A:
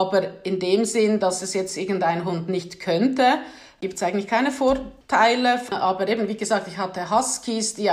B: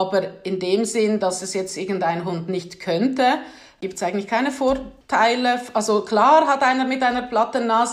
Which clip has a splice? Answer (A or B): A